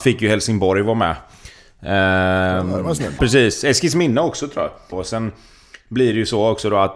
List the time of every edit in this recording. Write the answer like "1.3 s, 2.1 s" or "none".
3.2 s, 4.9 s

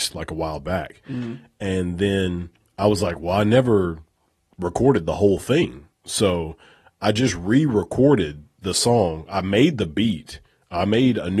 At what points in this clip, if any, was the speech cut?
none

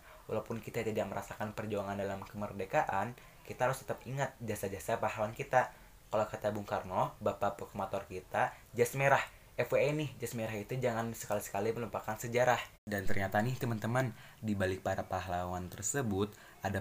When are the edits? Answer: 12.7 s

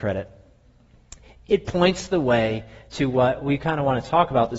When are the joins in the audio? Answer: none

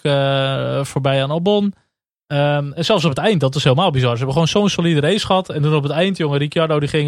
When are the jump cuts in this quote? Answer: none

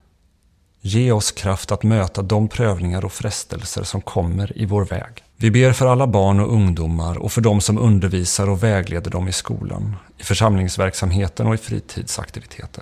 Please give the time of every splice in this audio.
5.3 s

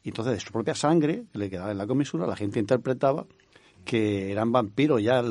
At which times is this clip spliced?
none

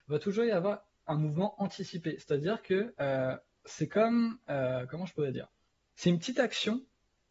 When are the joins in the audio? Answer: none

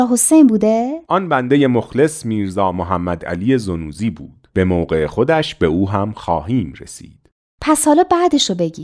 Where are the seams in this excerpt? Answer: 1.0 s, 4.5 s

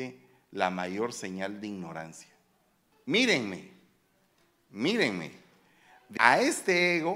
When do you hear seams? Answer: 2.9 s, 6.2 s

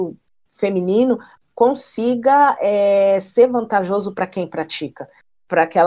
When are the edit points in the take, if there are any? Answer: none

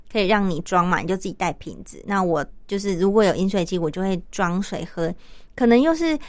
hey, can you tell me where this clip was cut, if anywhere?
none

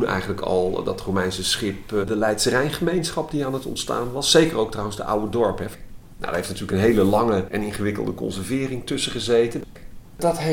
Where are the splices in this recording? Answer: 2.0 s, 5.7 s

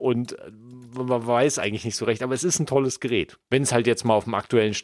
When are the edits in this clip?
3.4 s

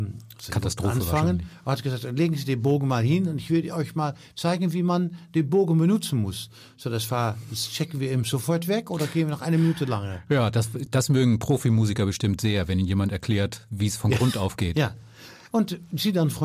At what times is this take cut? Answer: none

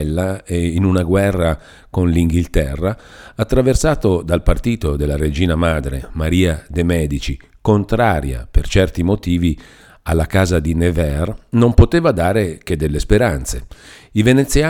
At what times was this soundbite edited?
none

